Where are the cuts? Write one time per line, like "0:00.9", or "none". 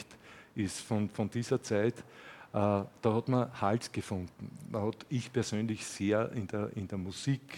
none